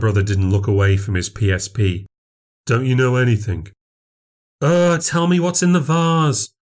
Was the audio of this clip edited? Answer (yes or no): yes